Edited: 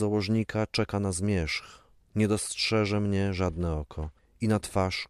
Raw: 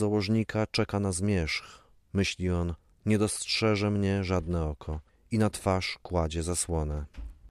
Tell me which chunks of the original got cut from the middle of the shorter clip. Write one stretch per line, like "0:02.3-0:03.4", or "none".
0:02.0-0:02.9